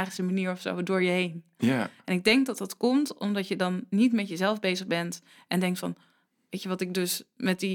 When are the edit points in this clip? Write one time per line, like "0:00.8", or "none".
none